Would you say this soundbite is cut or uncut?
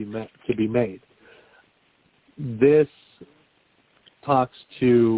cut